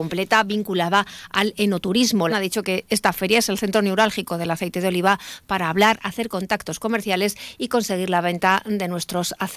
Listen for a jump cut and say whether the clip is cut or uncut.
cut